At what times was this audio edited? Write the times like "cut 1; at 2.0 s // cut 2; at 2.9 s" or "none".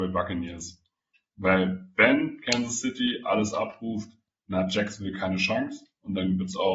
none